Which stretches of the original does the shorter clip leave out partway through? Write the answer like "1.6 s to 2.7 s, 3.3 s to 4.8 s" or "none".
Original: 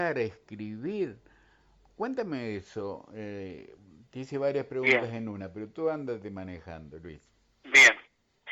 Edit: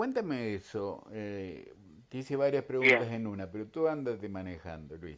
none

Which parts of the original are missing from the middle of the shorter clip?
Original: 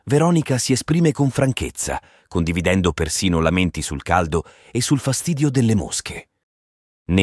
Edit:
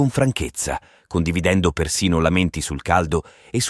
none

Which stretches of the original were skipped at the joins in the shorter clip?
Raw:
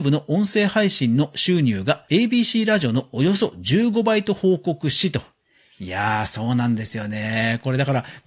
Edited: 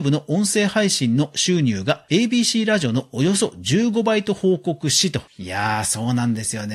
5.3 s to 5.7 s

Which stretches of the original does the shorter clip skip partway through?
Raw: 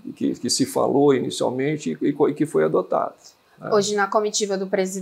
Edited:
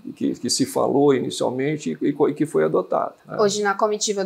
3.2 s to 3.5 s

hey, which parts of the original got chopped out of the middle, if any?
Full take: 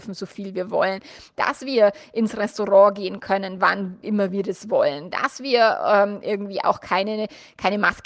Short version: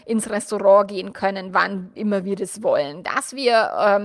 none

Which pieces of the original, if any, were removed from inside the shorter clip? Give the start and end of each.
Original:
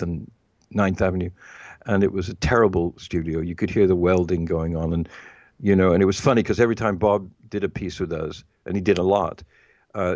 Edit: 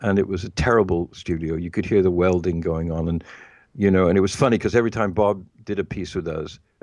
none

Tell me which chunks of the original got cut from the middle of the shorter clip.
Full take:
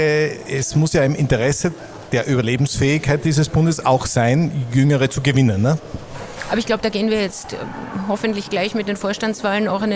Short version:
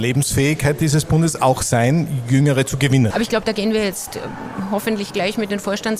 5.5 s to 6.5 s

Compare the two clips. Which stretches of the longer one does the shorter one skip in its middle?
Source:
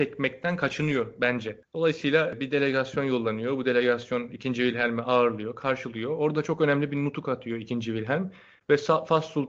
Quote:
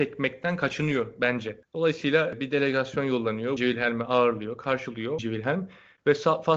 3.6 s to 4.5 s, 6.2 s to 7.8 s

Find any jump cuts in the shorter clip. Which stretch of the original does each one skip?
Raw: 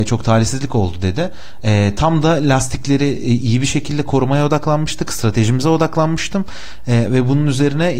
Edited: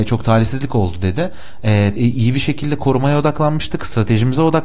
2.0 s to 3.2 s

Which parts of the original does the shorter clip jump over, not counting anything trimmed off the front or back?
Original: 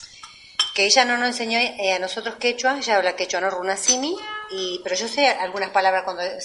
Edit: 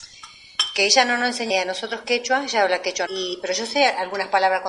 1.5 s to 1.8 s, 3.4 s to 4.5 s

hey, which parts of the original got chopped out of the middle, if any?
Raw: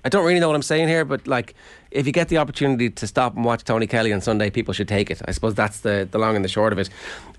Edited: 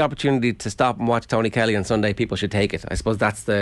none

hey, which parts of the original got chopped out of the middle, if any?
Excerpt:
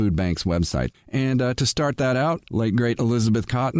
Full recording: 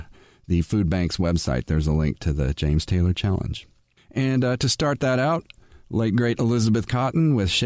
1.6 s to 3.9 s, 5.5 s to 5.9 s

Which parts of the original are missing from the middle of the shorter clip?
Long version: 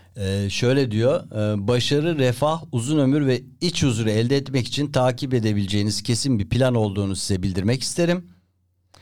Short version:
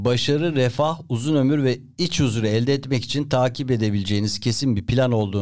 none

